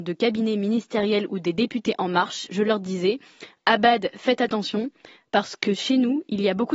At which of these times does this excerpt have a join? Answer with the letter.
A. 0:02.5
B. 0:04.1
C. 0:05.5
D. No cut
D